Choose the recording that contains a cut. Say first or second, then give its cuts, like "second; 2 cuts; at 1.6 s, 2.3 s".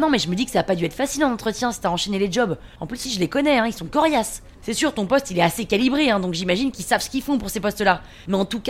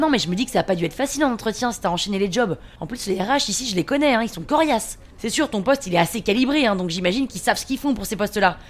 first; 1 cut; at 3.1 s